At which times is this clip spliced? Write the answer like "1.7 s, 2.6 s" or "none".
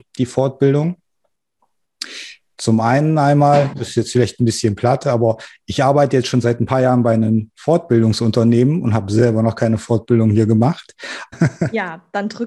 2.5 s, 11.3 s